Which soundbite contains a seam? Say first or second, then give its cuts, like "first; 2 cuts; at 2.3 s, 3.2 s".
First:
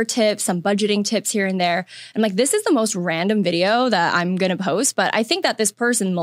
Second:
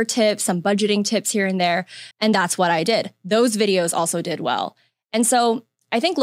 second; 1 cut; at 2.1 s